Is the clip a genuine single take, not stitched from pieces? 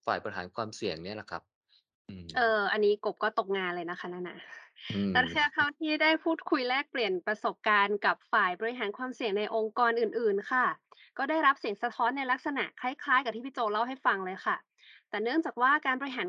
yes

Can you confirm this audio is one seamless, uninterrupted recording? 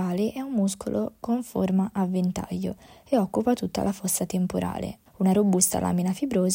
no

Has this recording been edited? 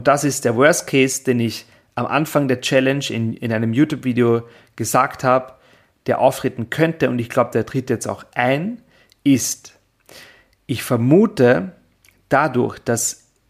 no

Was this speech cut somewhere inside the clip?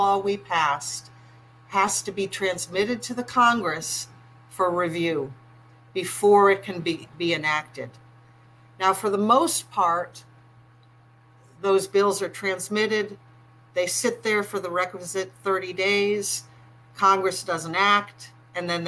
no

